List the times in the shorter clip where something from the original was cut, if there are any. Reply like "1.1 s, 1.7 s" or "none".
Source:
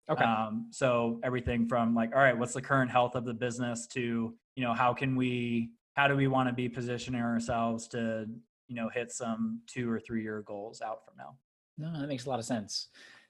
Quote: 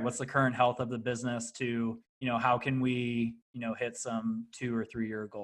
3.4 s